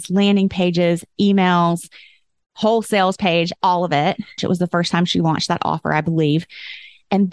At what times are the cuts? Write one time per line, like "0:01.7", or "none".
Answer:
0:04.4